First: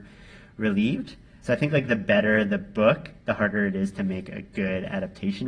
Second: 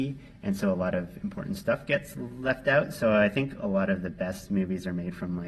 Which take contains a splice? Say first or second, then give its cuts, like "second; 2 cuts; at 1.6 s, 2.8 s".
first; 1 cut; at 1.4 s